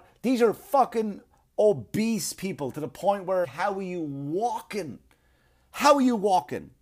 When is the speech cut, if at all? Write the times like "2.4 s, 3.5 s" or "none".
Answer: 3.4 s

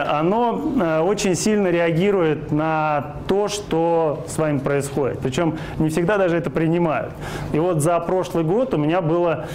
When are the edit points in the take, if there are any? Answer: 5.2 s, 7.5 s

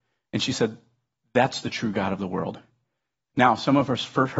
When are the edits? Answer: 3.3 s

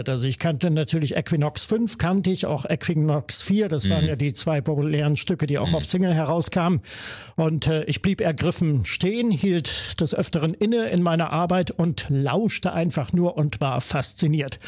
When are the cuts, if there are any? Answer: none

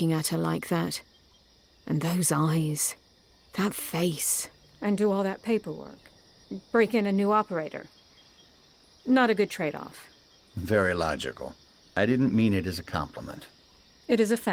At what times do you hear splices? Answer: 11.8 s

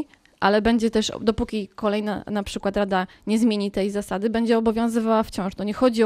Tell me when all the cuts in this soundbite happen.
none

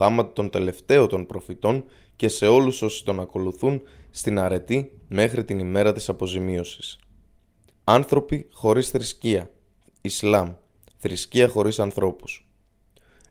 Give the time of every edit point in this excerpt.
7.7 s

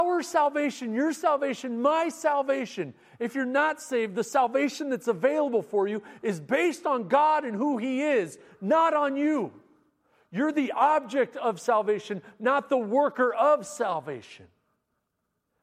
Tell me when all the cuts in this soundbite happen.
none

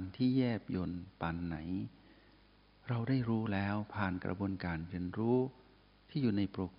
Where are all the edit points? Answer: none

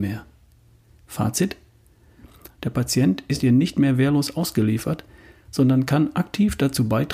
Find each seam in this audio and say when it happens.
2.5 s

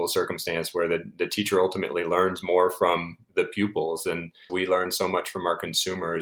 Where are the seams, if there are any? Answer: 4.5 s

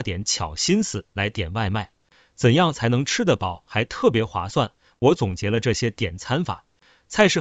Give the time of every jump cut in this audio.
none

